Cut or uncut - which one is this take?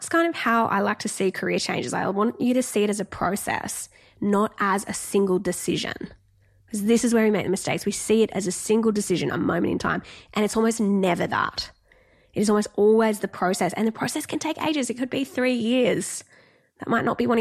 uncut